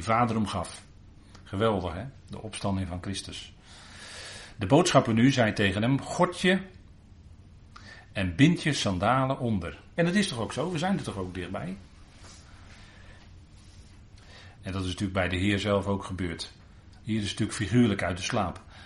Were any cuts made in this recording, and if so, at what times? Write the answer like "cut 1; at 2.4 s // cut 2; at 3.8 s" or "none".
cut 1; at 10.0 s // cut 2; at 14.5 s // cut 3; at 17.0 s